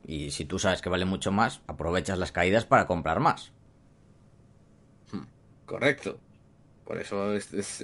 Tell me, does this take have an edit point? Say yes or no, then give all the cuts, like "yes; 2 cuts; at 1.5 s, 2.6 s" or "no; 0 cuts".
yes; 2 cuts; at 1.7 s, 5.5 s